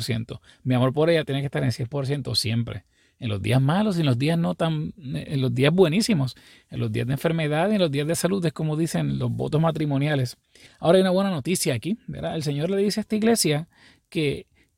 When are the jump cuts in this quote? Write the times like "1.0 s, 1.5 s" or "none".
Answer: 10.7 s